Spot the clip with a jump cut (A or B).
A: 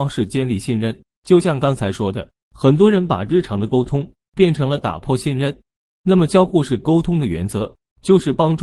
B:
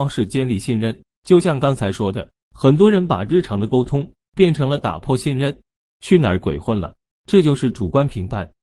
B